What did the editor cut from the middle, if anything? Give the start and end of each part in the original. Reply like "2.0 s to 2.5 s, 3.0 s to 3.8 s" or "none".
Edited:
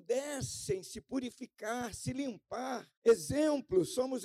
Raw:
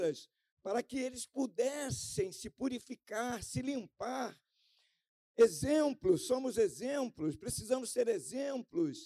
4.4 s to 5.3 s